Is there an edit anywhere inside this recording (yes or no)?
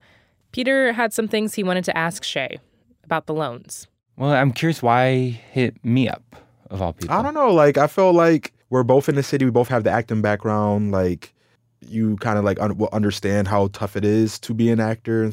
yes